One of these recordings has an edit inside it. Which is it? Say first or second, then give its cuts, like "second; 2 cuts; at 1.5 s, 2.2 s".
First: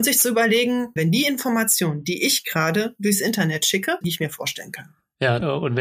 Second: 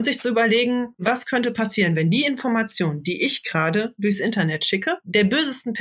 first; 2 cuts; at 1.0 s, 4.0 s